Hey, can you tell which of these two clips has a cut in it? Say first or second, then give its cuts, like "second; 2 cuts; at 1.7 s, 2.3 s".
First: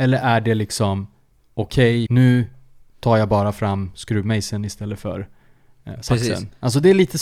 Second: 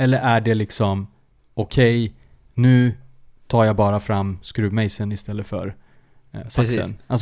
first; 1 cut; at 2.1 s